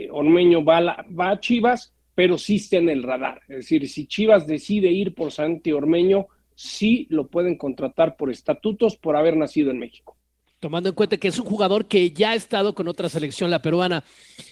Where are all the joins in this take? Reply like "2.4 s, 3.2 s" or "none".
none